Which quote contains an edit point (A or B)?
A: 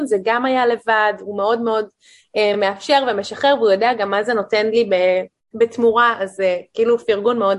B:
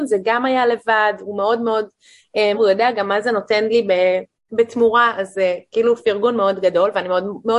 B